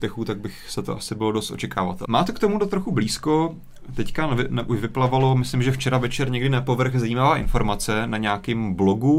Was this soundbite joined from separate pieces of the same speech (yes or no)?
yes